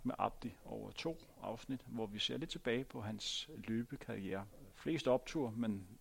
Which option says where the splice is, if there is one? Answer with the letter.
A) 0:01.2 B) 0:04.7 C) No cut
B